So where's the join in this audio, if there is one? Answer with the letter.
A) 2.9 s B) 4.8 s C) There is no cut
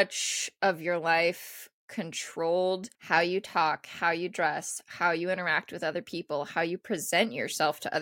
A